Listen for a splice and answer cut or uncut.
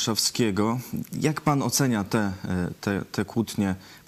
uncut